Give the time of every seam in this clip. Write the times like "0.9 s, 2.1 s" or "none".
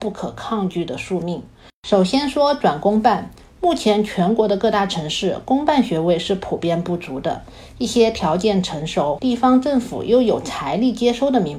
9.2 s